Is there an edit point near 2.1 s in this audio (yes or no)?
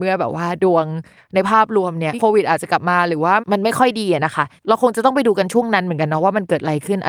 yes